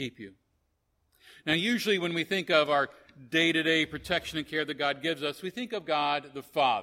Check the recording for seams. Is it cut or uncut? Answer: uncut